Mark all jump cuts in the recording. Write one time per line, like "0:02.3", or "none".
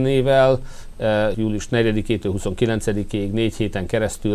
0:01.3

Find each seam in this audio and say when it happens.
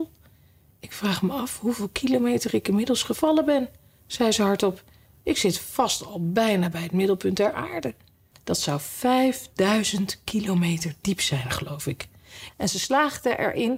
0:08.3
0:12.5

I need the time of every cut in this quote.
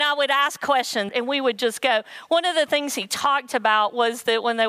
0:01.1

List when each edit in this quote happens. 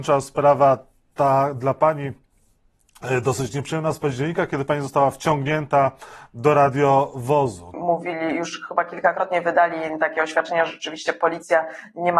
0:07.7

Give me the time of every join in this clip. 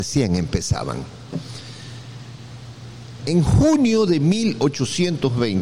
0:03.2

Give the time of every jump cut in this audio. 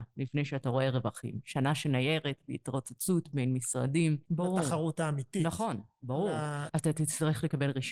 0:04.3
0:06.7

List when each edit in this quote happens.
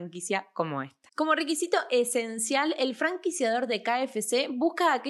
0:01.1

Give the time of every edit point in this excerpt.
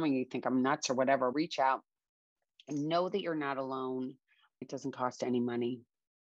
0:01.3
0:04.6

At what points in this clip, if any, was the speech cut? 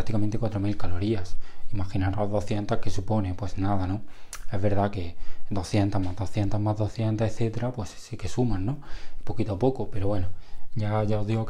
none

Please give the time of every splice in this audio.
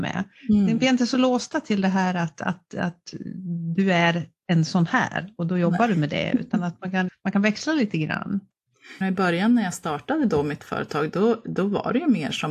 0:07.1
0:09.0

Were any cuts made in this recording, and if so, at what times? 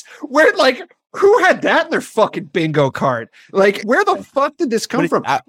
0:03.8

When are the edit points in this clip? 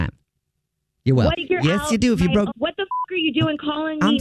0:01.3
0:02.5

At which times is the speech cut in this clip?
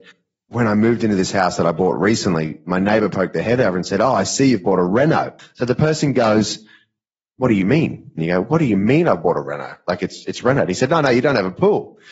0:08.2

